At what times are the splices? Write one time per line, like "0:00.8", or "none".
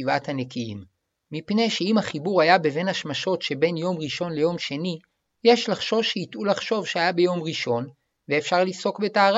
none